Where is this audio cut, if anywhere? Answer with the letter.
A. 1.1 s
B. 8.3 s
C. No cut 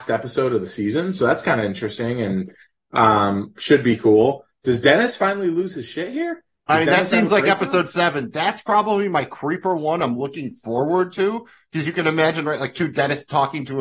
C